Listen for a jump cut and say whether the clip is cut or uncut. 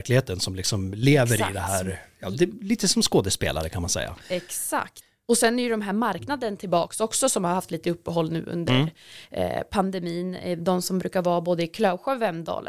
uncut